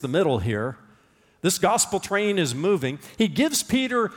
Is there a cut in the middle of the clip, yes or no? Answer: no